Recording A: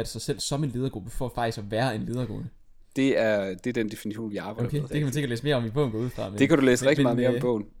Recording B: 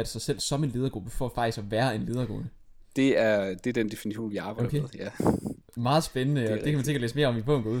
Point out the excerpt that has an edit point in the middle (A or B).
A